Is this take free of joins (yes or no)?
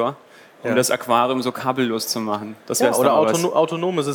yes